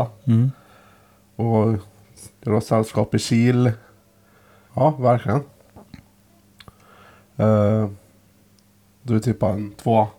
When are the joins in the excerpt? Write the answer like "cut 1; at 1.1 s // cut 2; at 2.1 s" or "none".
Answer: cut 1; at 4.7 s